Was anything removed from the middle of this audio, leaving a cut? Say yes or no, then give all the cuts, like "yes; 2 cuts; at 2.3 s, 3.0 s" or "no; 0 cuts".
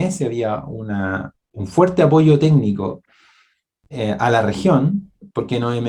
no; 0 cuts